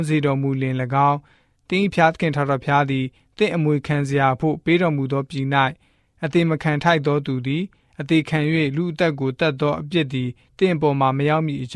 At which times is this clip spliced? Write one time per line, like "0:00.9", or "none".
none